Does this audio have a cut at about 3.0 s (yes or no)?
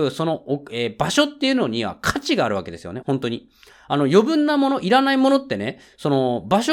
yes